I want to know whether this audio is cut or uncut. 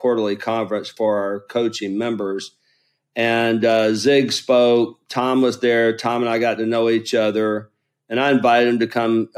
uncut